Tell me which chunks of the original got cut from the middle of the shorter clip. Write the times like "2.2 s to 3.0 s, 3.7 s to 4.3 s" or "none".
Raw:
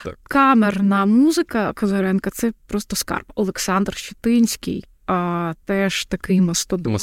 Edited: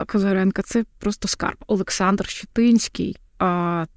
none